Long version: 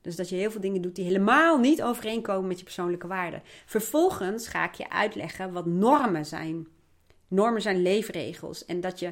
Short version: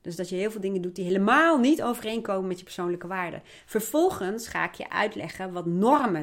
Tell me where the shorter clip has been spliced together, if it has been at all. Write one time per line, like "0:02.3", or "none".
none